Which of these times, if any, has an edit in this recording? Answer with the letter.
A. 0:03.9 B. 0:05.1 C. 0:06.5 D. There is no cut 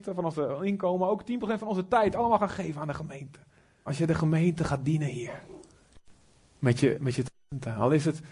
A